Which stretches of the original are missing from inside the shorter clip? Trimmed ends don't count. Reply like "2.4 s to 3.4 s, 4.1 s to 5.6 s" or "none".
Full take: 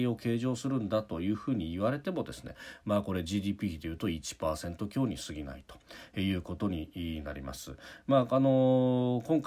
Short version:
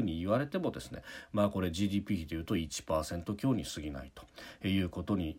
none